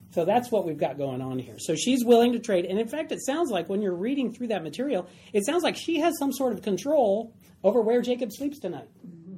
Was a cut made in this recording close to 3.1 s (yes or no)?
no